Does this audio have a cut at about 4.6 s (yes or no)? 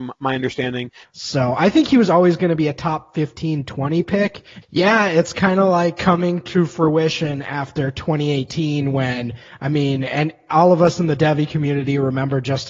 yes